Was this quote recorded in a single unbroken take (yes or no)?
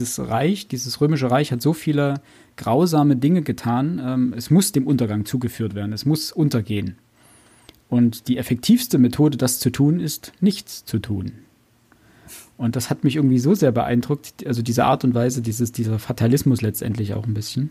yes